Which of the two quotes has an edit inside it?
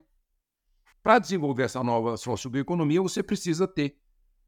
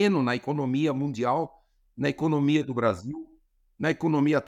first; 1 cut; at 0.9 s

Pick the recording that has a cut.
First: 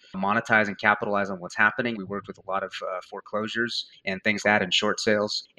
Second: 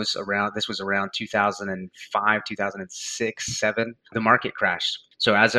first; 2 cuts; at 1.9 s, 4.4 s

